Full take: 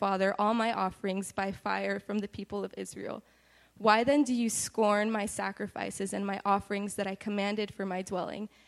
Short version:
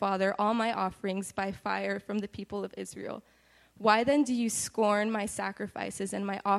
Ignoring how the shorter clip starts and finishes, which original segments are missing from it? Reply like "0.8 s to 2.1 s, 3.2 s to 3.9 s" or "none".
none

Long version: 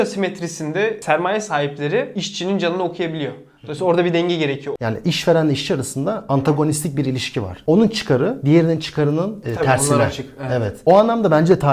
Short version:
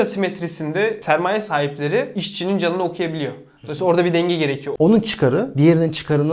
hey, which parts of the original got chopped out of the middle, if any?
4.8 s to 7.6 s

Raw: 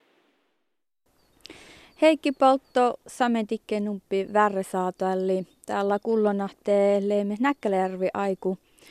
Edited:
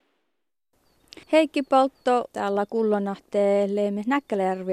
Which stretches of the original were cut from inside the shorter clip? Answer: 1.6 s to 1.9 s, 3.0 s to 5.6 s

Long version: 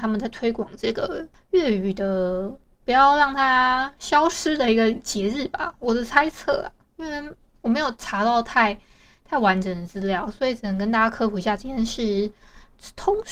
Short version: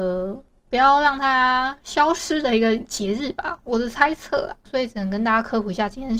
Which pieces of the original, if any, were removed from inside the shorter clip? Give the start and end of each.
6.8 s to 10.3 s

